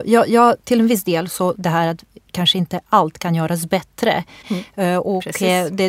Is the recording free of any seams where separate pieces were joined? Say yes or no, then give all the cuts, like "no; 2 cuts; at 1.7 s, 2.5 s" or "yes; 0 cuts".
no; 2 cuts; at 1.5 s, 4.4 s